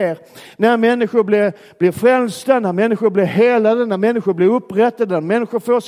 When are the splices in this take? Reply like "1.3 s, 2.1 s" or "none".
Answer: none